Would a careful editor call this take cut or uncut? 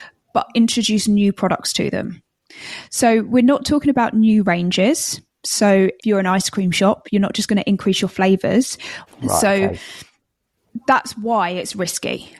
cut